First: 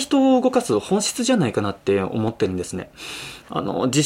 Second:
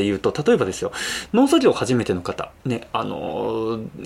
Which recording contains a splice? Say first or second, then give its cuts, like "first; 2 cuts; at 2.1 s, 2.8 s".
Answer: second; 1 cut; at 2.6 s